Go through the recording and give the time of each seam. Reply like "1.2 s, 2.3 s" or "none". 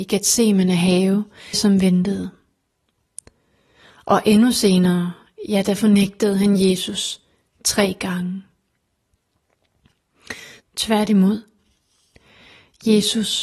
1.5 s, 10.6 s